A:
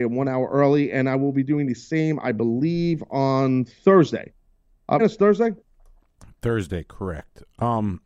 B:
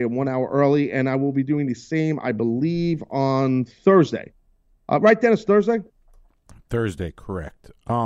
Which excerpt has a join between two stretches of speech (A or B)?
A